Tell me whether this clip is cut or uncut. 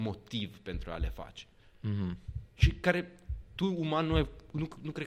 uncut